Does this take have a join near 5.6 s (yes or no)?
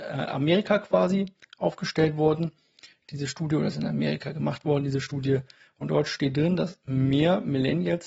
no